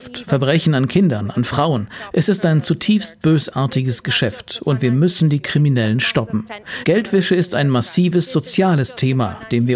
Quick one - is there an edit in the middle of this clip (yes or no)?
yes